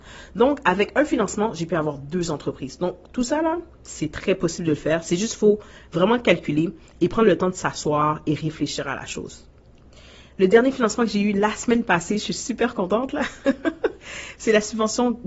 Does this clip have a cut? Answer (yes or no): no